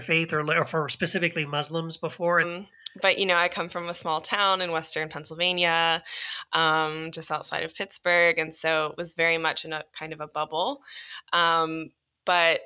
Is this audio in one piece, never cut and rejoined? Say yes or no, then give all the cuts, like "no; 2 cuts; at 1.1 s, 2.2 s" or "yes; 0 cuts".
no; 1 cut; at 2.4 s